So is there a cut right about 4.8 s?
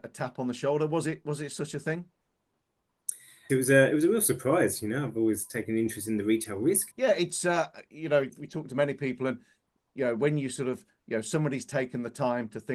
no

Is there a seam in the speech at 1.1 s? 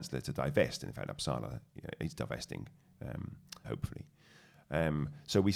no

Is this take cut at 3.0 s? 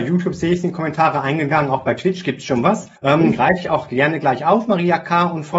yes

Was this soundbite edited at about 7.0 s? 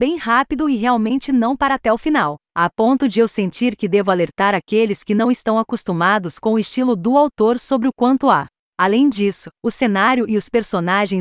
no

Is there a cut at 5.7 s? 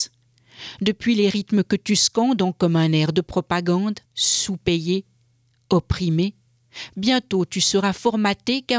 no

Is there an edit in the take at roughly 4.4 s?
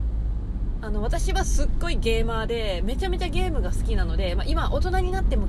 no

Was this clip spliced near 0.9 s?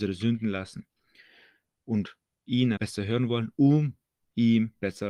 no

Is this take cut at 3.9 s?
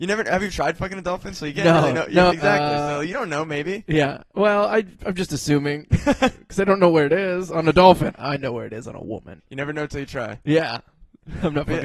no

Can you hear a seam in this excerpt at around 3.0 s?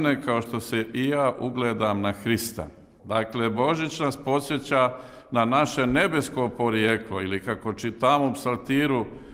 yes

